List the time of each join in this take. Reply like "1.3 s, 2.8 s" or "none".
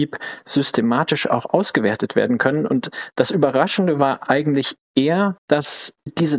none